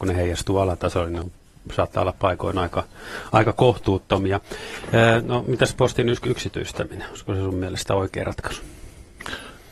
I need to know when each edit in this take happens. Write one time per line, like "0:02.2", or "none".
none